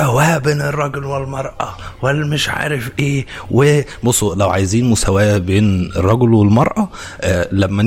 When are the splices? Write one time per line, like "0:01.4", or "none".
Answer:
none